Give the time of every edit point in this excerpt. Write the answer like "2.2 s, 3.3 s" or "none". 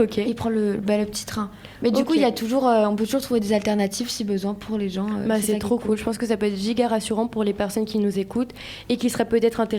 none